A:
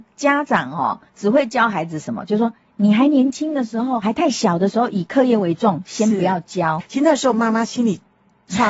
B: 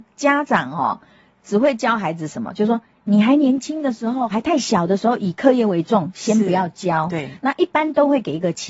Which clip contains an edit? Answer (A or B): A